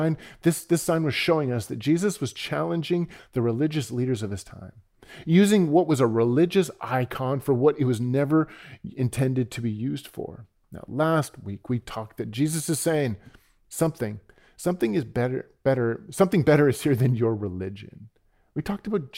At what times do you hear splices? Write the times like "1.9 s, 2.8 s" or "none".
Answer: none